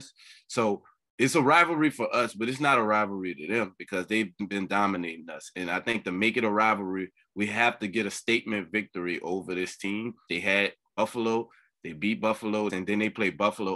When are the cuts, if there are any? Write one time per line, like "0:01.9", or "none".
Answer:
0:10.3
0:12.7